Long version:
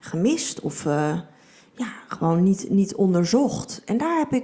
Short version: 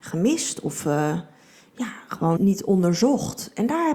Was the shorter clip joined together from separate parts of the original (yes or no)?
yes